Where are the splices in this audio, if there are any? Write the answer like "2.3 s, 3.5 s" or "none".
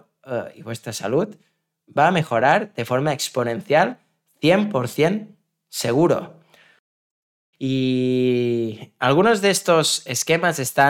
7.5 s